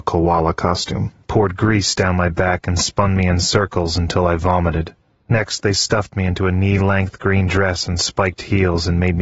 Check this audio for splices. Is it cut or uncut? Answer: uncut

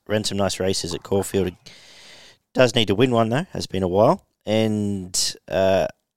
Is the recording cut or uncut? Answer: uncut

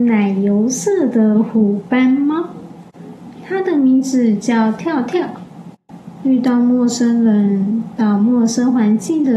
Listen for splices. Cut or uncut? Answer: cut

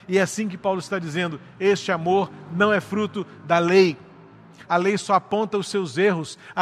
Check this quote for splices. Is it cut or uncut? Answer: cut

